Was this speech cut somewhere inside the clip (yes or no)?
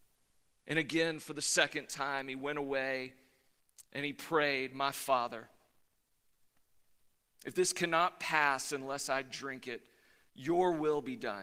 no